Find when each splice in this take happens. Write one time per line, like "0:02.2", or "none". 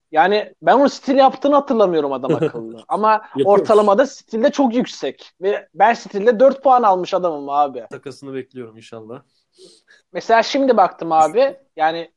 0:07.9

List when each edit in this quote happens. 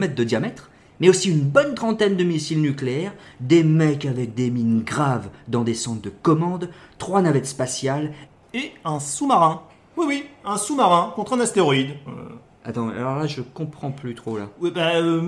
0:12.1

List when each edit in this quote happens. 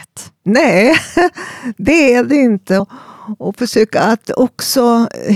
0:02.8
0:04.2

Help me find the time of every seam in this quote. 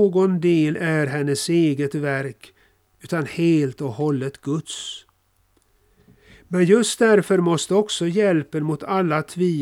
none

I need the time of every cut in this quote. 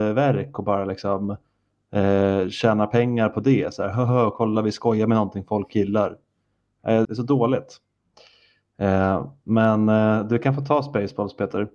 0:07.0

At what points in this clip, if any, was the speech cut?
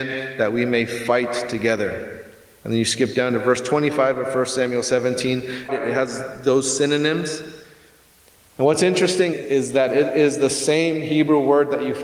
0:05.7
0:09.3

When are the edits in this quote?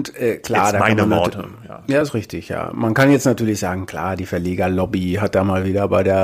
none

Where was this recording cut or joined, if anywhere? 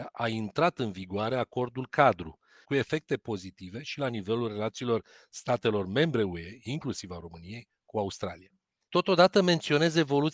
0:02.6

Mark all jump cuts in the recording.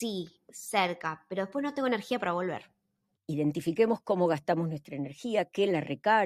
0:03.2

